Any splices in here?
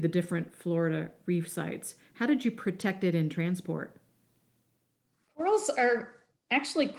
no; 0 cuts

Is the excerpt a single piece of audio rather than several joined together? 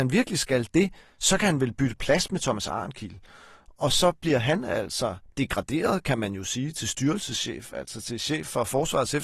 yes; 0 cuts

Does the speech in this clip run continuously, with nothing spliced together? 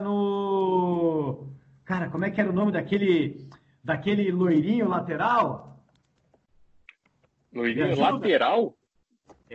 yes; 0 cuts

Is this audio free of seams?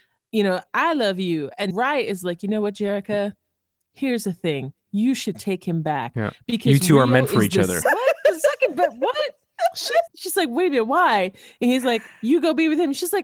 no; 3 cuts; at 1.7 s, 7.8 s, 10.1 s

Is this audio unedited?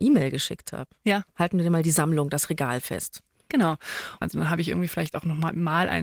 no; 2 cuts; at 1.3 s, 4.2 s

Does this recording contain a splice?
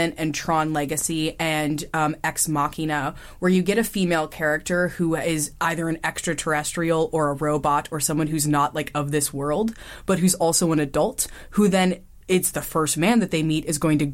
yes; 1 cut; at 12.5 s

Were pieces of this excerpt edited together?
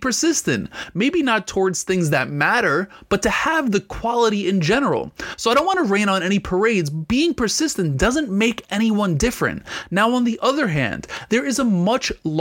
no; 0 cuts

